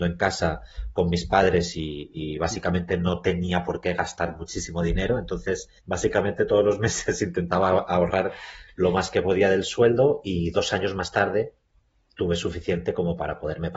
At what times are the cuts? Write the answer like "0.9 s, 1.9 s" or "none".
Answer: 5.8 s

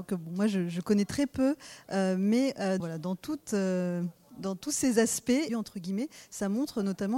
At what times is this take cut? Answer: 2.8 s, 5.5 s

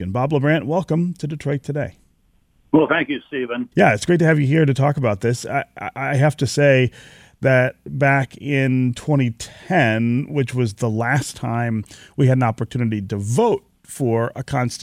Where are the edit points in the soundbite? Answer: 3.7 s

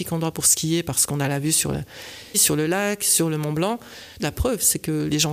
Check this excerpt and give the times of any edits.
2.3 s, 4.2 s

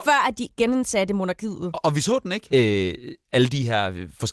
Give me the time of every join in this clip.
2.5 s

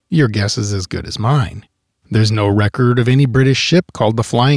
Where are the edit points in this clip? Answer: 1.9 s

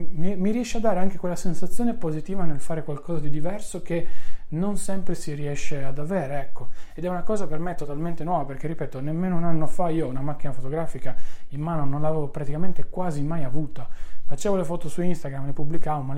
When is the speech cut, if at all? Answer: none

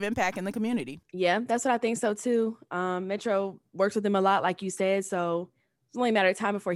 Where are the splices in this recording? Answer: none

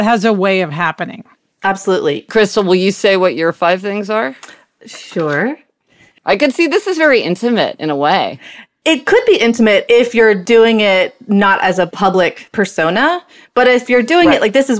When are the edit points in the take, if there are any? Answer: 6.2 s

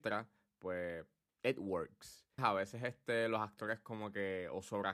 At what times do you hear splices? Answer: 2.4 s

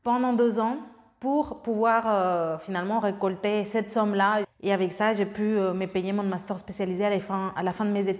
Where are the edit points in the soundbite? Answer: 4.4 s

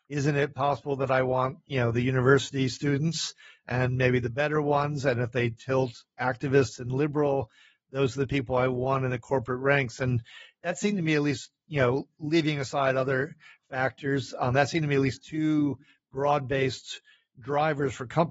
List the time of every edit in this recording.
none

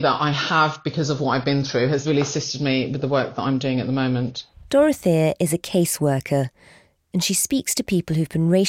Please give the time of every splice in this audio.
none

